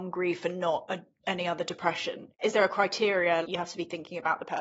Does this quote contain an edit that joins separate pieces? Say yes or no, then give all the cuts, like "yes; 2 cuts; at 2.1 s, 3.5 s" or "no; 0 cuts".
yes; 1 cut; at 3.4 s